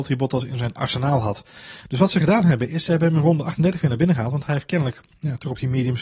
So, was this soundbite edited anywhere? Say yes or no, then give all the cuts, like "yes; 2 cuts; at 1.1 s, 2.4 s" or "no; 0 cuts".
no; 0 cuts